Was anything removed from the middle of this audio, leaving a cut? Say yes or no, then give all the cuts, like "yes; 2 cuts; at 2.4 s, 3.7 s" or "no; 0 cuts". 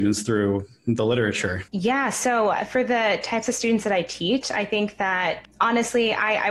yes; 2 cuts; at 1.7 s, 5.4 s